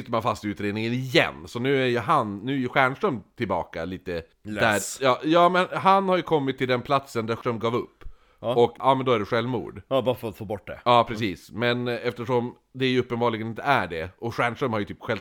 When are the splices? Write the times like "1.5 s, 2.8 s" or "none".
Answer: 4.3 s